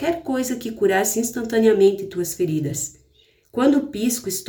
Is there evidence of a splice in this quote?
yes; 1 cut; at 3.4 s

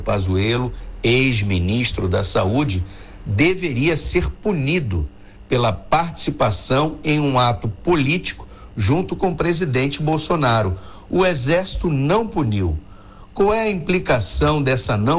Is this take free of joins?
yes; 0 cuts

